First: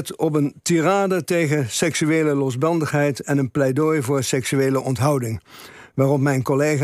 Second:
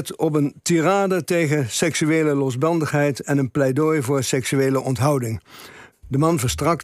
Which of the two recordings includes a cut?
second; 1 cut; at 5.9 s

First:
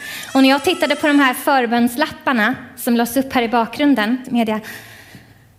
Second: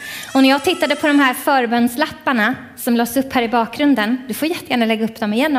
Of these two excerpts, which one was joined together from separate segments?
first; 1 cut; at 4.2 s

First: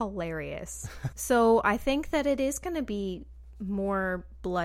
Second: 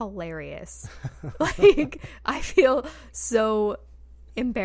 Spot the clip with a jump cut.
first; 1 cut; at 1.1 s

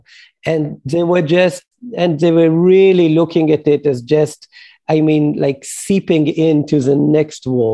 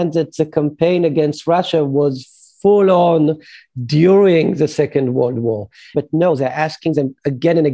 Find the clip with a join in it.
second; 1 cut; at 5.9 s

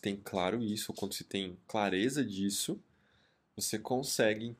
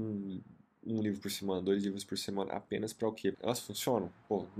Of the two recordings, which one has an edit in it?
second; 1 cut; at 3.3 s

